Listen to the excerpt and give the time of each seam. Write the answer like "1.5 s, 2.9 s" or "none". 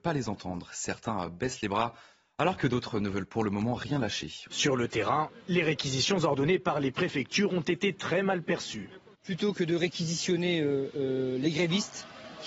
4.5 s